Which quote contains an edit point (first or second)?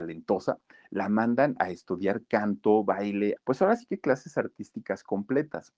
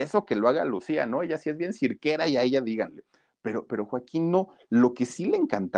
first